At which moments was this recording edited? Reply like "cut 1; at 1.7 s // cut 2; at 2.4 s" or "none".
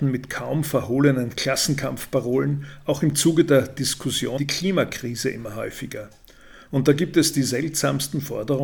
cut 1; at 4.4 s